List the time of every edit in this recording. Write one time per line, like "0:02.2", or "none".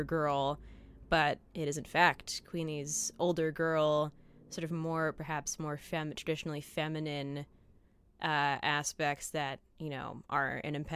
0:05.1